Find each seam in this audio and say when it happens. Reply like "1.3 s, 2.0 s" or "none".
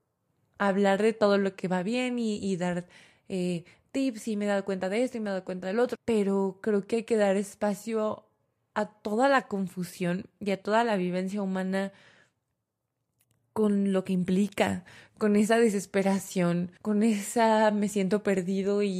5.9 s, 16.8 s

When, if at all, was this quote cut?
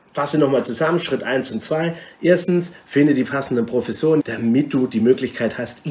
4.2 s

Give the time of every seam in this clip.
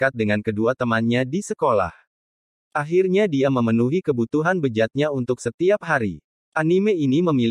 none

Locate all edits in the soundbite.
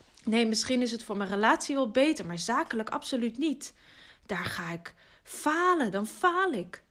none

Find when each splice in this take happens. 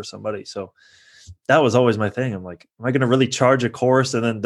none

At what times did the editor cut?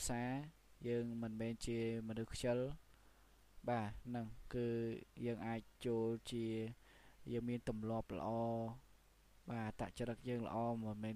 5.8 s

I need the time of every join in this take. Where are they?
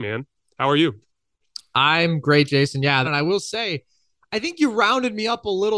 3.0 s

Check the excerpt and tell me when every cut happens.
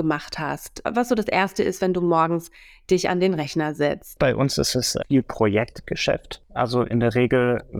4.2 s

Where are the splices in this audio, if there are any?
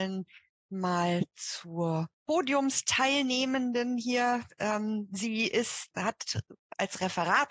2.1 s, 5.9 s

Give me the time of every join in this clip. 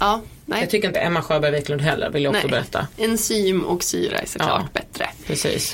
0.9 s

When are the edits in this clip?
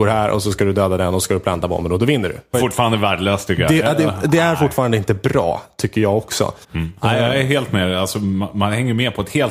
2.5 s, 6.6 s

